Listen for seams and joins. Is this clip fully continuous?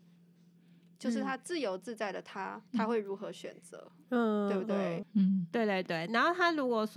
no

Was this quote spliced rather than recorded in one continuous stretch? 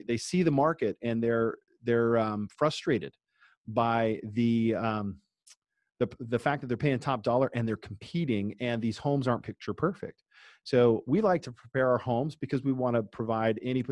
no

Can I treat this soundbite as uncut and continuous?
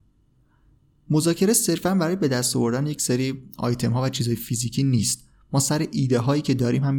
yes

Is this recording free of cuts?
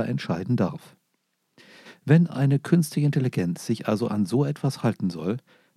yes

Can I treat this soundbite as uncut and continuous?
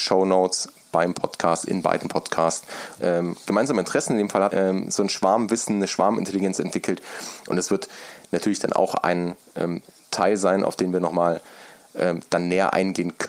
no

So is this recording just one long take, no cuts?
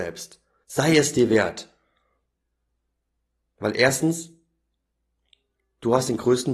yes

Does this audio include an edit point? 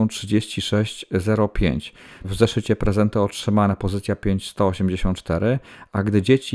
yes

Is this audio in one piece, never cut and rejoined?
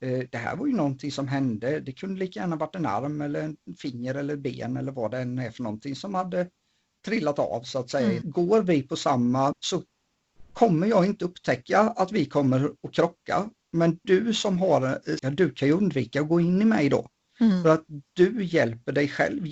no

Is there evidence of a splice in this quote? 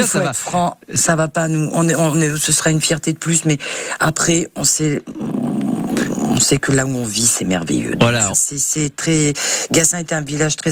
yes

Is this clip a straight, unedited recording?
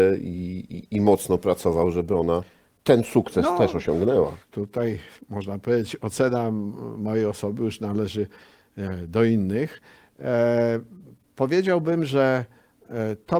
yes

